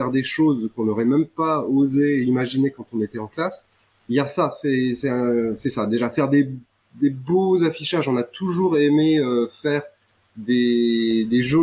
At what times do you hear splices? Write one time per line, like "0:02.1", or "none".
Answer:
none